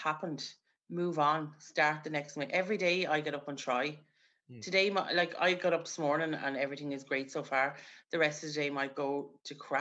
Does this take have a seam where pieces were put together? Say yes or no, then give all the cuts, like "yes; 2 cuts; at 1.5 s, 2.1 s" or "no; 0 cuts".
no; 0 cuts